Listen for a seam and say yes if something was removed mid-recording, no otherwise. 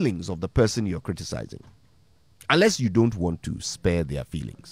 no